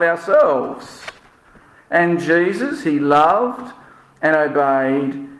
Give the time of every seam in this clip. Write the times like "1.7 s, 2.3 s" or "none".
1.7 s